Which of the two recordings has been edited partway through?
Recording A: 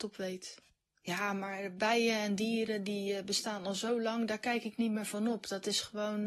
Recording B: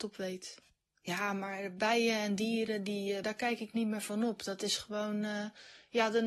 B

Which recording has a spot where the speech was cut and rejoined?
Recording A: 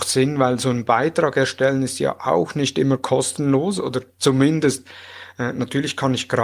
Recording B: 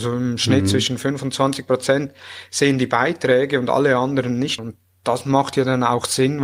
B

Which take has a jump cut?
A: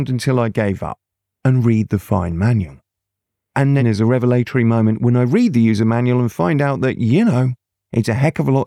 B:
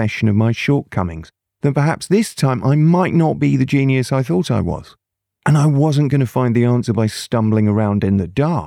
A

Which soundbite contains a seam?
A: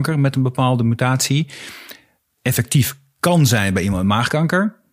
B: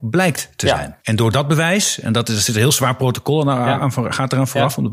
B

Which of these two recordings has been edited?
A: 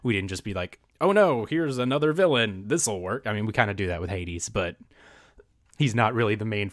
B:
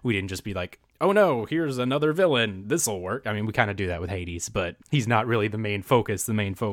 B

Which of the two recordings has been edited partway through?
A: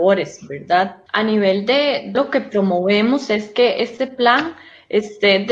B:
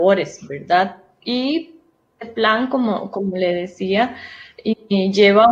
A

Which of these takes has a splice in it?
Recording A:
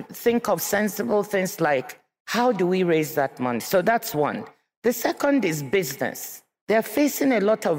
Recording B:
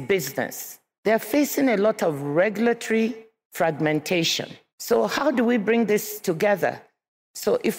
B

